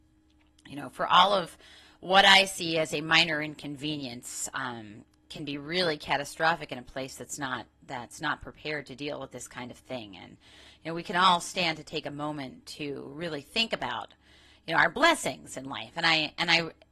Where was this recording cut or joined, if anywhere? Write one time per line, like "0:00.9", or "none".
none